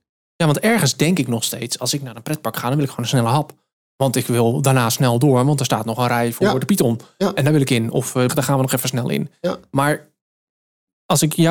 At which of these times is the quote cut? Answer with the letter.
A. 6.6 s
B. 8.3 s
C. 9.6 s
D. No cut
B